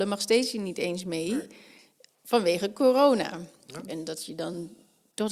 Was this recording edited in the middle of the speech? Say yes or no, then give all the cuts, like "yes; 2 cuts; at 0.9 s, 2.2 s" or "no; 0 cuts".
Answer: yes; 1 cut; at 3.9 s